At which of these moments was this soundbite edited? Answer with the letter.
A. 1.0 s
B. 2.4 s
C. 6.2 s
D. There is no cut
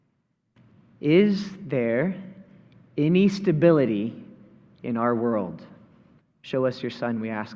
C